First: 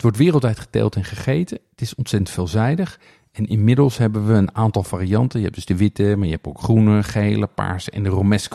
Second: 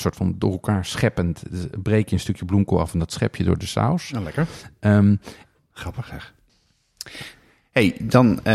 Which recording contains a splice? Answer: second; 1 cut; at 5.6 s

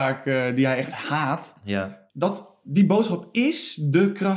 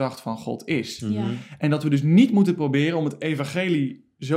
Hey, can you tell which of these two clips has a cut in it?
first; 1 cut; at 2.1 s

